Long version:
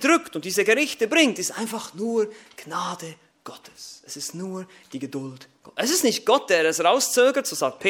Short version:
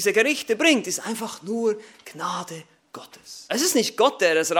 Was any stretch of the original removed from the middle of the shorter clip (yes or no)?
yes